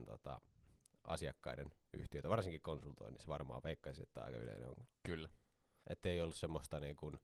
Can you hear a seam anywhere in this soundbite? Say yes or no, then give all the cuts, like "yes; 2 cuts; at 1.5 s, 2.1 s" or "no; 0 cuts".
yes; 1 cut; at 5.8 s